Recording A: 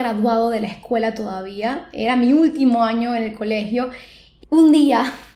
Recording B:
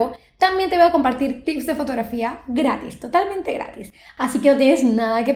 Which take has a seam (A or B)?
A